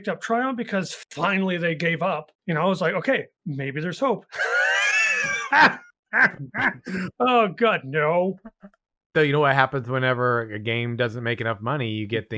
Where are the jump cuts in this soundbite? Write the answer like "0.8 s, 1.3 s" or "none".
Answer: 2.4 s, 9.1 s